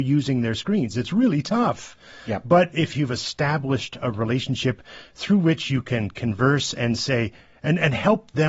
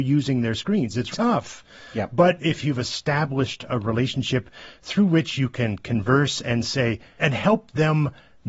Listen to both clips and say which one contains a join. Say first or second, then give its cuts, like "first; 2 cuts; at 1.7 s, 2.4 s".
second; 2 cuts; at 1.1 s, 7.2 s